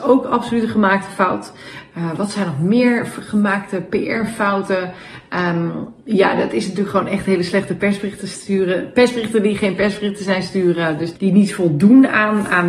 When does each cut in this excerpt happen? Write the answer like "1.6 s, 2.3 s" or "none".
11.1 s